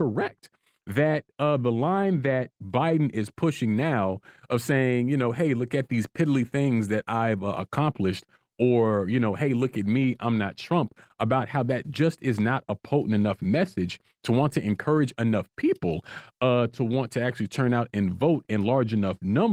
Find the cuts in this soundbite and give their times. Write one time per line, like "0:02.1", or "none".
none